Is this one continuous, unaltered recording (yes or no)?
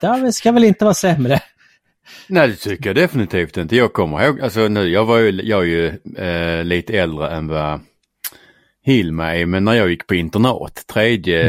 yes